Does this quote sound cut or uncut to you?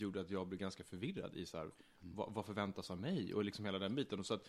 uncut